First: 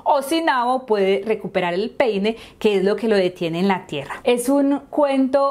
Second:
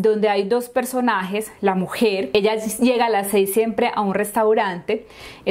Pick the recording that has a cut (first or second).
first